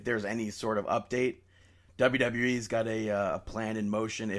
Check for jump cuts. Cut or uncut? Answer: uncut